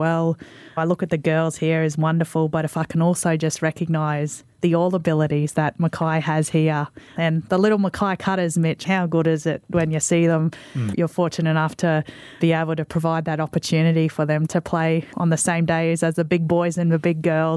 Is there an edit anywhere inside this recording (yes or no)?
no